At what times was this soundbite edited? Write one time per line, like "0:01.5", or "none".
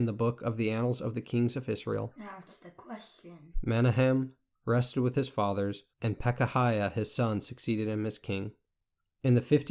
0:03.5
0:05.9